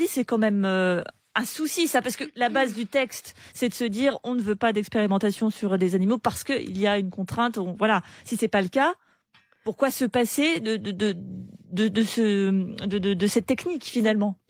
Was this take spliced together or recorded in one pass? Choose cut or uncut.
uncut